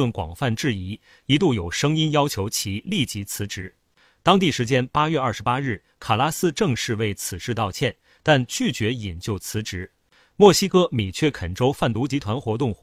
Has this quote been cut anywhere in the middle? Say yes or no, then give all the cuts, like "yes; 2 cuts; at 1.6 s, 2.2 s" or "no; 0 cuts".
no; 0 cuts